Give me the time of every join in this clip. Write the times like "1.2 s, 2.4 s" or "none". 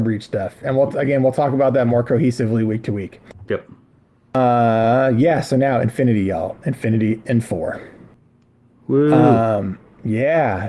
none